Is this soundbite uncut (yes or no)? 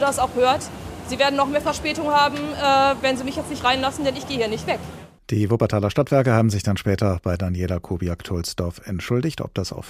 no